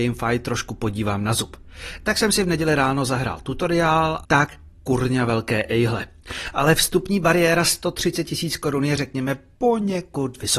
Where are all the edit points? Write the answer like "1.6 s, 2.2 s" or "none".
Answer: 4.2 s, 6.5 s